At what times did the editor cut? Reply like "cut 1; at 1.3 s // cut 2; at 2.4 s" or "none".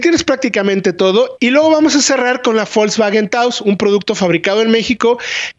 cut 1; at 1.4 s